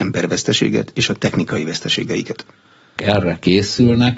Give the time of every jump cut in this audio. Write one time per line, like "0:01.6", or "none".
0:03.0